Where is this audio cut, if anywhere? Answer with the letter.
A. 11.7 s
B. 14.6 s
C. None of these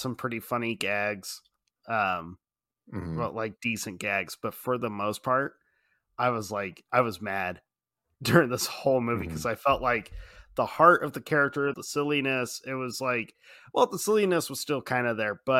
A